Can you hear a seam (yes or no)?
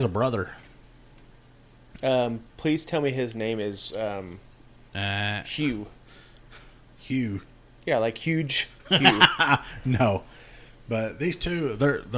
no